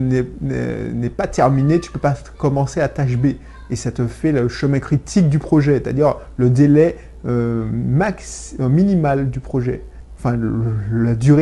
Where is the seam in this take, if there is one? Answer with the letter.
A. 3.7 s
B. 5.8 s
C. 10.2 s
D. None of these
D